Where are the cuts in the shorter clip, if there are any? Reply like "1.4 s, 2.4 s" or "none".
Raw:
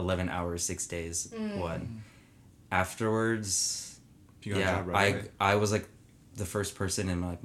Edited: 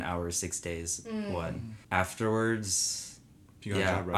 1.8 s